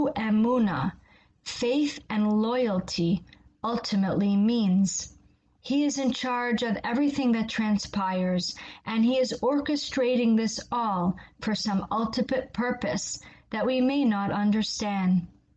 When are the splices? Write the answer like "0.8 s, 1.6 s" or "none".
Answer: 5.6 s

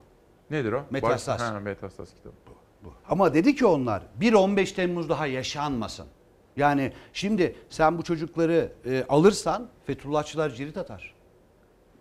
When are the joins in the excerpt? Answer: 3.0 s, 6.5 s

